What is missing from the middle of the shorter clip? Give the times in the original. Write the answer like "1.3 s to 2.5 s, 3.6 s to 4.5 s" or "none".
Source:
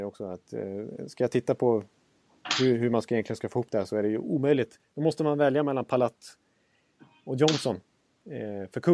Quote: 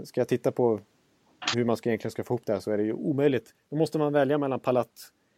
2.6 s to 2.8 s